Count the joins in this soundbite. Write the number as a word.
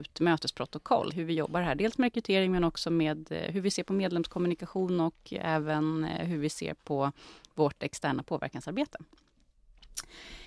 one